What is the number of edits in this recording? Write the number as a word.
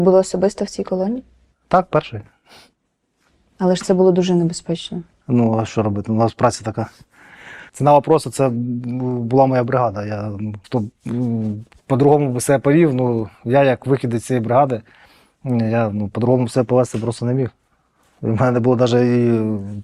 two